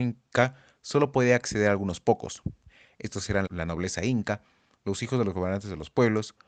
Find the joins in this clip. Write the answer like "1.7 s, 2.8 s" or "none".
3.5 s